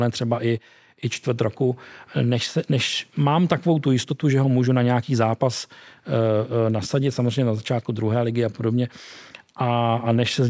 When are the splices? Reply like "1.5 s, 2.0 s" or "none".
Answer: none